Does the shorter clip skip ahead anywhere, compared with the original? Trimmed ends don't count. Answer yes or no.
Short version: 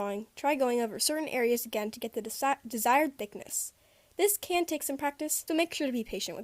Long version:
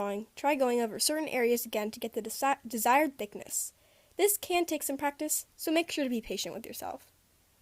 yes